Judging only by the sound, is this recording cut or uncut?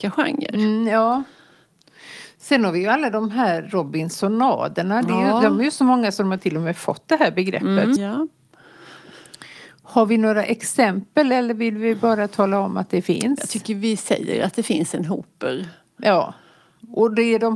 cut